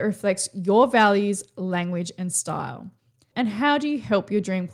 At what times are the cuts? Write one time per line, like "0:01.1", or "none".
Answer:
0:03.3